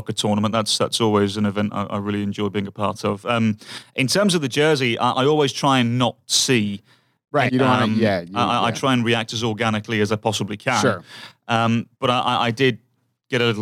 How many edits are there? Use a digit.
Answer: 1